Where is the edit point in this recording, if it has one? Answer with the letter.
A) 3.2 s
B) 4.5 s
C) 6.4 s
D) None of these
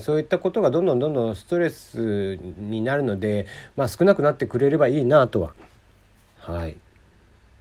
C